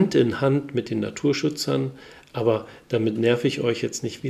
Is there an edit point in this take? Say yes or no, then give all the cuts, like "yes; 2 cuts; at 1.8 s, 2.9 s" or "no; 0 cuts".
no; 0 cuts